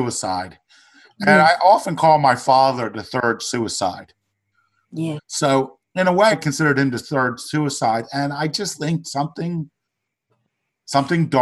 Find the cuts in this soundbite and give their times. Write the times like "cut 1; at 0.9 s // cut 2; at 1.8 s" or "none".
cut 1; at 5.2 s // cut 2; at 6.3 s